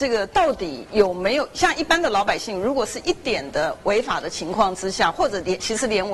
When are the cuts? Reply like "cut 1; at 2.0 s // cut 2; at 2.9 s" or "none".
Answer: cut 1; at 3.2 s